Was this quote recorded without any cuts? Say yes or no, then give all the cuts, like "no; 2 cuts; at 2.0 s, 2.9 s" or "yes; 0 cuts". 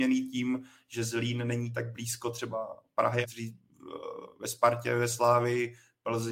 no; 1 cut; at 3.2 s